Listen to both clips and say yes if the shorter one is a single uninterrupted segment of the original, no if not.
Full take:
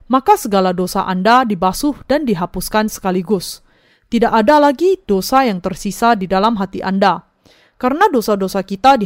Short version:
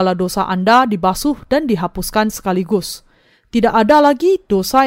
yes